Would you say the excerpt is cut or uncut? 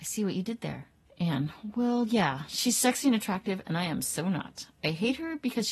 cut